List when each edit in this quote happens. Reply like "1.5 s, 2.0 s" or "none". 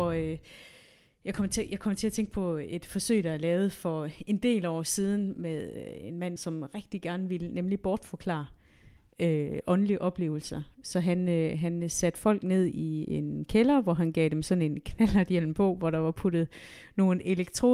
6.4 s